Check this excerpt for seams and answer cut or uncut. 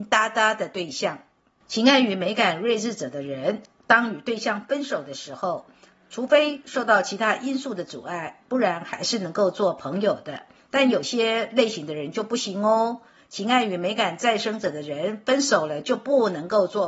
uncut